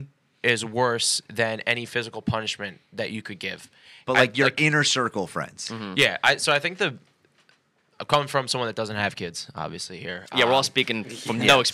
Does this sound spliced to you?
yes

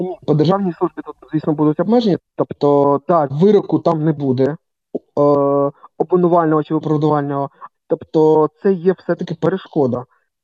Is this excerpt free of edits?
no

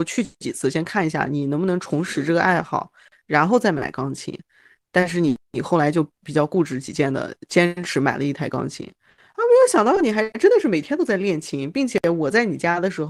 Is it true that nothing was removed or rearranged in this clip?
yes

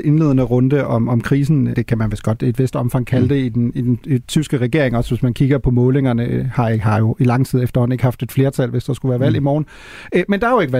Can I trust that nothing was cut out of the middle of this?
no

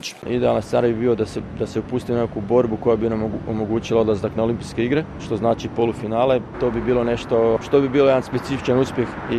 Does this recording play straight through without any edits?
yes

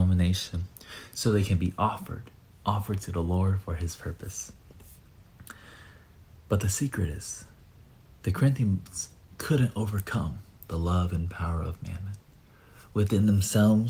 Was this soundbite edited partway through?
no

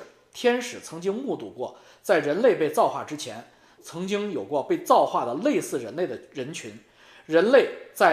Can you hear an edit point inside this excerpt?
yes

